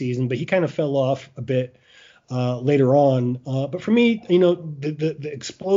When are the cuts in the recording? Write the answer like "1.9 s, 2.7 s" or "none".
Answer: none